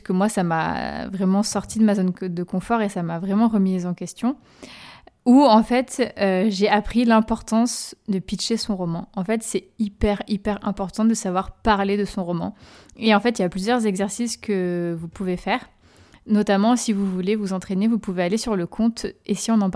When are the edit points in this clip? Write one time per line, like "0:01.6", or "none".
none